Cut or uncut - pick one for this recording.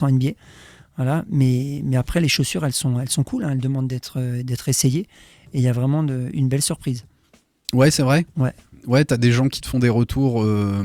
uncut